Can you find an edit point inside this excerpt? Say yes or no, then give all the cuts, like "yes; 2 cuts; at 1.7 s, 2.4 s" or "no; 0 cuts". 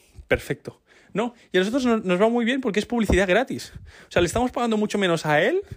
no; 0 cuts